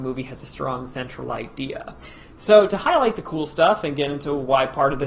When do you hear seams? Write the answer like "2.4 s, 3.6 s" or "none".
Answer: none